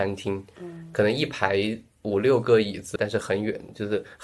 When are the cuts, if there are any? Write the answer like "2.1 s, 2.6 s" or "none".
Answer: 3.0 s